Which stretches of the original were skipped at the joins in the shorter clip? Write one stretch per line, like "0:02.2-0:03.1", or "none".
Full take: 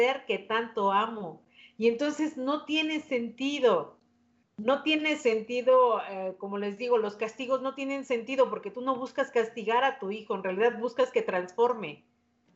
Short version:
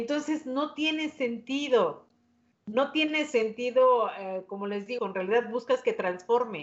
0:06.9-0:10.3